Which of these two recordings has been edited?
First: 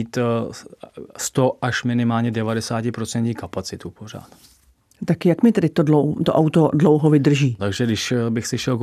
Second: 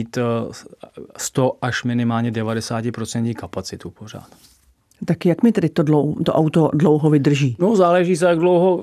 first; 1 cut; at 7.6 s

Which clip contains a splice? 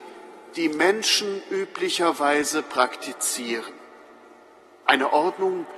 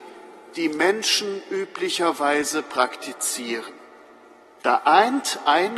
second; 1 cut; at 4.6 s

